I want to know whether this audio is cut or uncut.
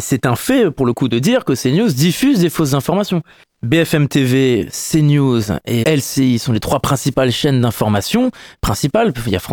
cut